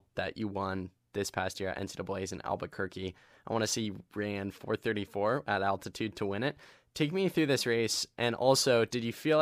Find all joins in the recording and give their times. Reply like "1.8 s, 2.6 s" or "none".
none